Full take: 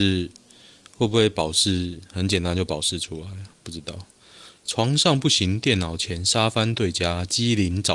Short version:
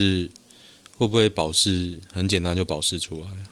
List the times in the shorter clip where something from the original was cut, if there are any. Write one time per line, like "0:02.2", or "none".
none